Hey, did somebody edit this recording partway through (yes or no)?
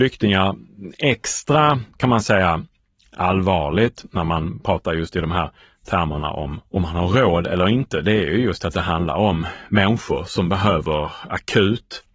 no